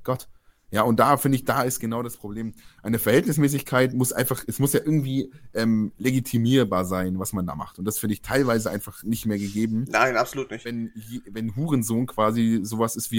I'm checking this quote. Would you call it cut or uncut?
uncut